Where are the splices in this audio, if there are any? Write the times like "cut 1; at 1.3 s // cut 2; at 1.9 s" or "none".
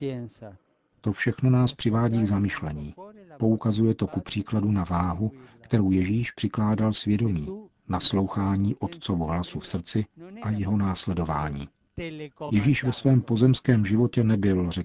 none